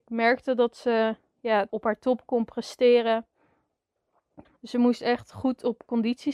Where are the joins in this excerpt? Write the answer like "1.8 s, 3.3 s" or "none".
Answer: 1.7 s, 4.4 s